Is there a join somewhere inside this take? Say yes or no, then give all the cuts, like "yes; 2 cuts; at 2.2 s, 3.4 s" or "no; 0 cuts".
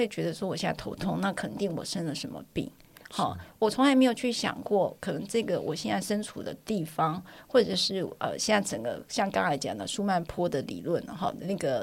no; 0 cuts